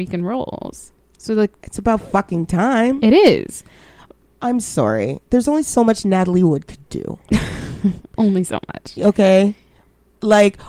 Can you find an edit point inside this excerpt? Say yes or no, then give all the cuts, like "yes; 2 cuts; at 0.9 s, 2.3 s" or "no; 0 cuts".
no; 0 cuts